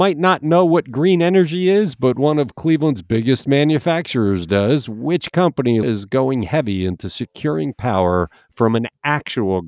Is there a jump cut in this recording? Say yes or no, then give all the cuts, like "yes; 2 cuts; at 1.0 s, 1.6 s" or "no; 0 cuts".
yes; 1 cut; at 5.8 s